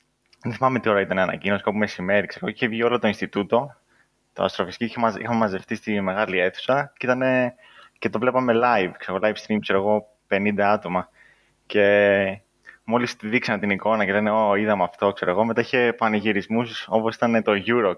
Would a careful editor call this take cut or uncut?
uncut